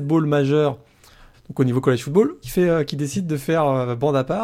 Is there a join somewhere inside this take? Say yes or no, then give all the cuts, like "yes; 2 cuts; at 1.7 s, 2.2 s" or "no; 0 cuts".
yes; 2 cuts; at 1.3 s, 2.4 s